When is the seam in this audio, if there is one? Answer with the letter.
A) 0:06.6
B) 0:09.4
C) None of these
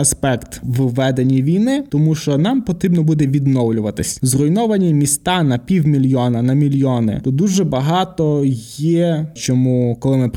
B